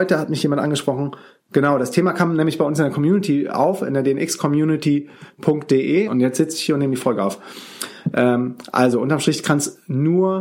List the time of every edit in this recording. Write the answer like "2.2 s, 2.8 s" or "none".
6.1 s